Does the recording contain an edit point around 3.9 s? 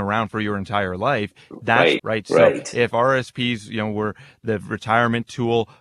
no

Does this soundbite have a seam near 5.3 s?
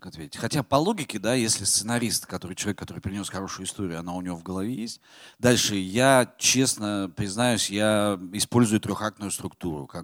yes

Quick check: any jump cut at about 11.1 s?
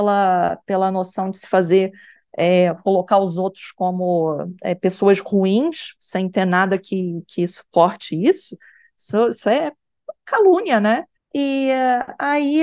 yes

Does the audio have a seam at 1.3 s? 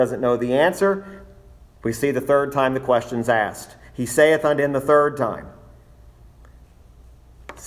no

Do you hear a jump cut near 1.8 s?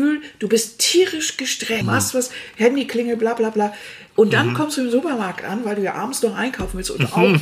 yes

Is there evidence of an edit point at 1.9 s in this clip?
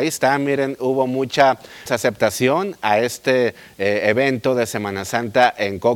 yes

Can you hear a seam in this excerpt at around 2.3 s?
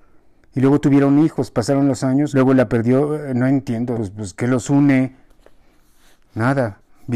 yes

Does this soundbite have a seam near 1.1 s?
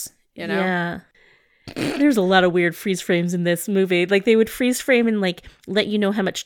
yes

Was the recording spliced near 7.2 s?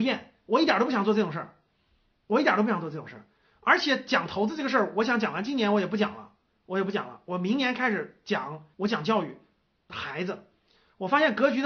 no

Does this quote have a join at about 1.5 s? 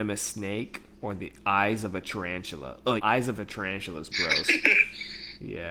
no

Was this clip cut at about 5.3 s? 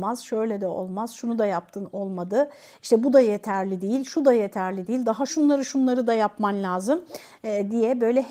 yes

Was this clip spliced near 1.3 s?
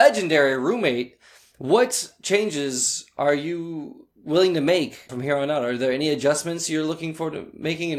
no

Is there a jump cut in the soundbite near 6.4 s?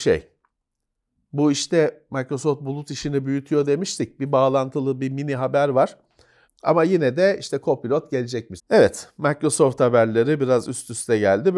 yes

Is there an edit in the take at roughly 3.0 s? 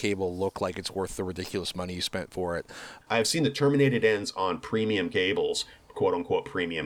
yes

